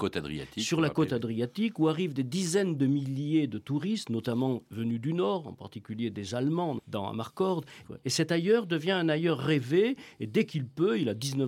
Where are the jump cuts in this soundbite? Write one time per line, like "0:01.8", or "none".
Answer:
0:06.8
0:07.8